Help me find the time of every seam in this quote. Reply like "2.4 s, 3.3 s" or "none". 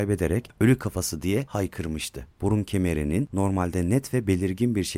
2.3 s